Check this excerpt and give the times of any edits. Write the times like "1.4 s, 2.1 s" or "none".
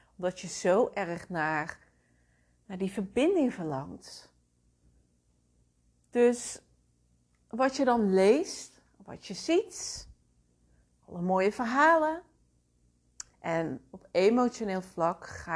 13.3 s